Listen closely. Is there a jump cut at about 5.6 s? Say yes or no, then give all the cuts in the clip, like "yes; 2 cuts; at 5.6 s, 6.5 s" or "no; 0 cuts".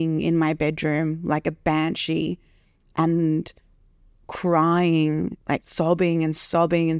yes; 1 cut; at 5.6 s